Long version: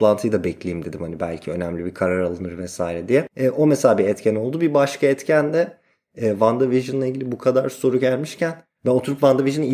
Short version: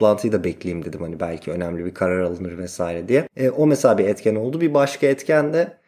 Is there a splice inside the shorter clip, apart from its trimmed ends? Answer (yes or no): no